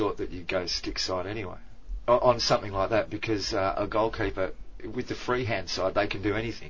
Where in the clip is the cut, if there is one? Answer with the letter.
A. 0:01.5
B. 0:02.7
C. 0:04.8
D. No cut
C